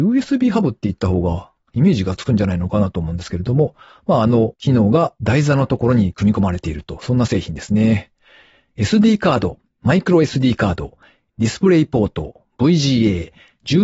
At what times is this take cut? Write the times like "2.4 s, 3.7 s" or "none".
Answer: 11.3 s